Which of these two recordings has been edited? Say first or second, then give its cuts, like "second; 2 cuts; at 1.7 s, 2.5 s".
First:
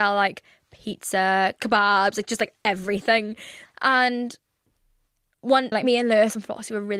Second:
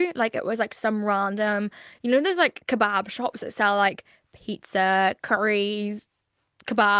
first; 3 cuts; at 1.6 s, 3.7 s, 5.7 s